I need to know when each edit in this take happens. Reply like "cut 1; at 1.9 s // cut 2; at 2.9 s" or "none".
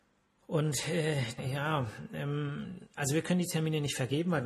cut 1; at 1.4 s